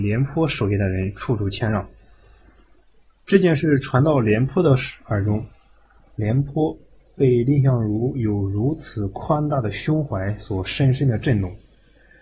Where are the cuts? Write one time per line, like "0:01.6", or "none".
none